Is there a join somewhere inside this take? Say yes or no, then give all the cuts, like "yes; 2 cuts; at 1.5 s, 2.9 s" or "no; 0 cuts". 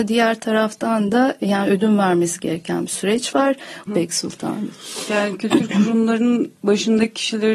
yes; 1 cut; at 3.9 s